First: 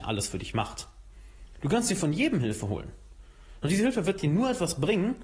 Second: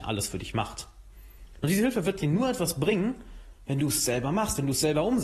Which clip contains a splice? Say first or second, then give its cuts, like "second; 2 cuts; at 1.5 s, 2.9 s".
second; 1 cut; at 1.6 s